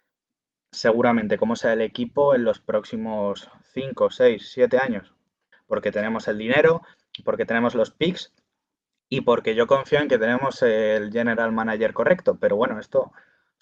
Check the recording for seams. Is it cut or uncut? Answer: cut